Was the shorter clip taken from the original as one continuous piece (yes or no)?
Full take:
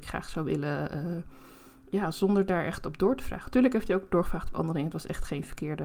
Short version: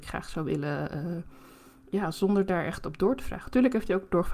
yes